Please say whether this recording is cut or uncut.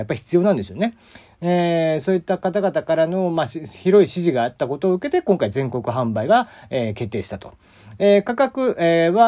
uncut